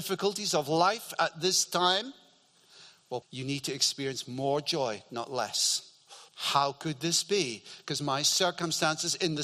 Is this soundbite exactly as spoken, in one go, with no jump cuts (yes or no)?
no